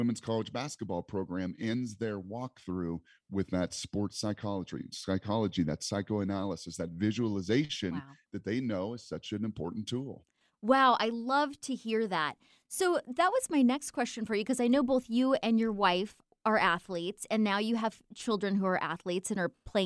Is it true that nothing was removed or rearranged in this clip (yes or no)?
yes